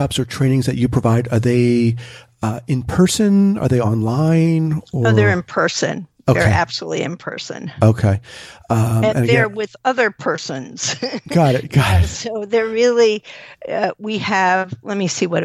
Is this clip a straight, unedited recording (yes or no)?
yes